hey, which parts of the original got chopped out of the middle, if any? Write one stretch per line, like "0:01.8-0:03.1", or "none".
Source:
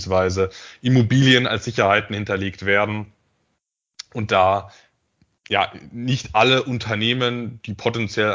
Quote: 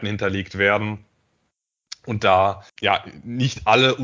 0:04.8-0:05.4